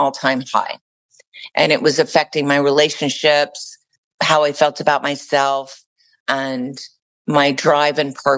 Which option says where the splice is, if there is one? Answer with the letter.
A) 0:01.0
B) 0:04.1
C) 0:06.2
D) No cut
D